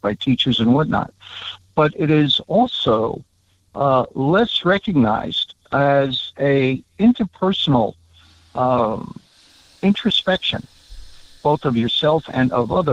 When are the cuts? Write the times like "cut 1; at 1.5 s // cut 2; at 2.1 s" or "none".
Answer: none